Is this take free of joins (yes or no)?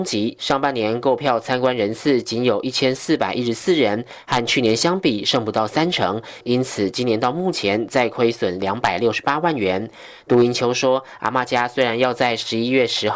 yes